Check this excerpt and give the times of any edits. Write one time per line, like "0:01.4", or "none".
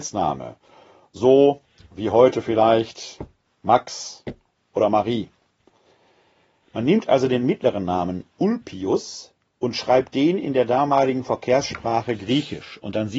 none